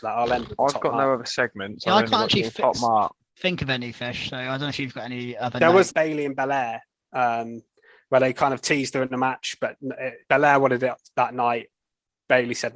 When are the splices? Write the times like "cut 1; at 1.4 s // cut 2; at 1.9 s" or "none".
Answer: cut 1; at 5.9 s // cut 2; at 10.2 s